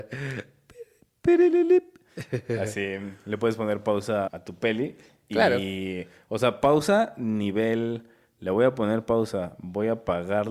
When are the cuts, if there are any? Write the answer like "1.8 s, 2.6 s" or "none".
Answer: 4.3 s